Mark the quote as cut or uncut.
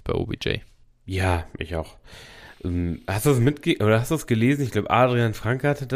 uncut